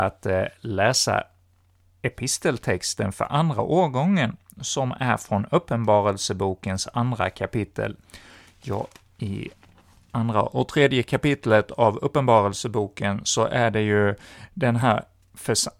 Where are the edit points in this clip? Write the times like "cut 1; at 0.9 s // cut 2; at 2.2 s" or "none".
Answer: none